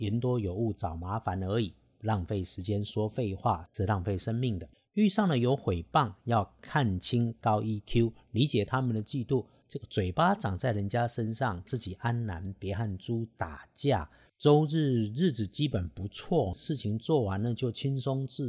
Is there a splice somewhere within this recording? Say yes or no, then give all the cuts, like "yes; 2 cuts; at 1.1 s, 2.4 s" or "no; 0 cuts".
yes; 2 cuts; at 14.3 s, 16.5 s